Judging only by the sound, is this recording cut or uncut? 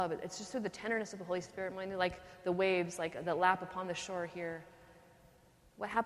uncut